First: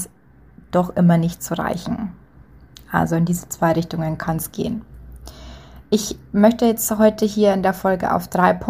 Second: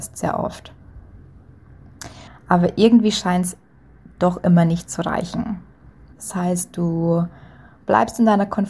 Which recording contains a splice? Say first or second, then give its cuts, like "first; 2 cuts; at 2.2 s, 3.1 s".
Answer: second; 2 cuts; at 2.3 s, 6.1 s